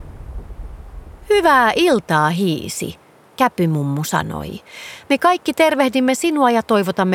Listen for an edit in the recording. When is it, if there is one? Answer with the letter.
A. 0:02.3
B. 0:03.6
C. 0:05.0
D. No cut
D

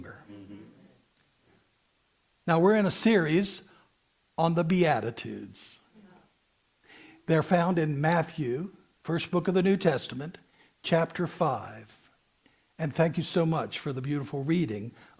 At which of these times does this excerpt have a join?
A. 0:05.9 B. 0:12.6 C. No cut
C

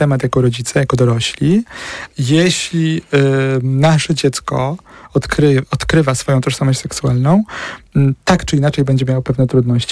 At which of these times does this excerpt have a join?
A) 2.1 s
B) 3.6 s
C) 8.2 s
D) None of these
A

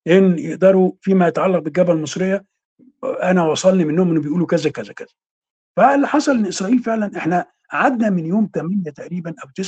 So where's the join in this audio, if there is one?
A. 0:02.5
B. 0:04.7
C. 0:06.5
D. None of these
B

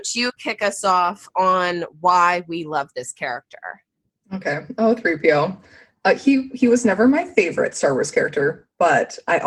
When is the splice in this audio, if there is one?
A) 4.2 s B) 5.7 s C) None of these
C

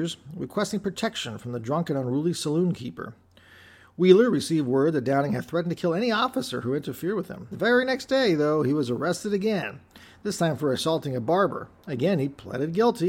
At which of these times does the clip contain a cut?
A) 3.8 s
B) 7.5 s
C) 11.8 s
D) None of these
B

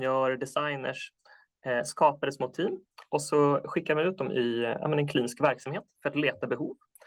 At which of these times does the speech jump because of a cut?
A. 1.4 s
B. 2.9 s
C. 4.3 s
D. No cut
D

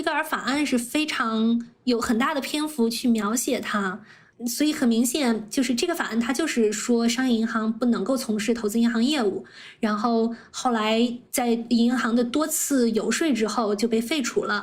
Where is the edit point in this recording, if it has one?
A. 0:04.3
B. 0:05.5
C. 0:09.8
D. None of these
A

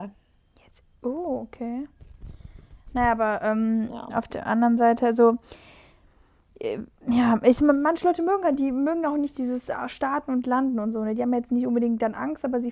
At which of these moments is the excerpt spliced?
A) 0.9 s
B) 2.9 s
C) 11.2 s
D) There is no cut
D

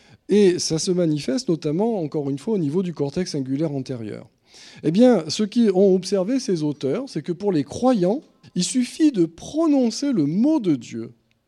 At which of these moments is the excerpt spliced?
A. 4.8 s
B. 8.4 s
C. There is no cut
B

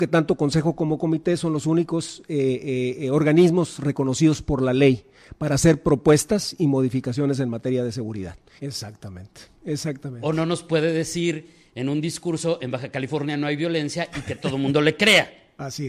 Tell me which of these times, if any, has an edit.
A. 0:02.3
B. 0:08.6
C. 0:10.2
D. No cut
B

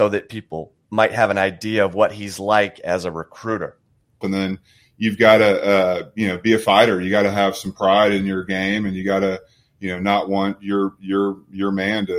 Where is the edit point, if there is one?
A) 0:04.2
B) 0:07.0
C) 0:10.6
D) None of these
A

